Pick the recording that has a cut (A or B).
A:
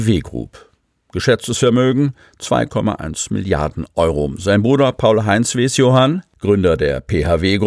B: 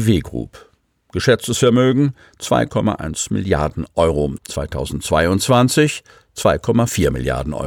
B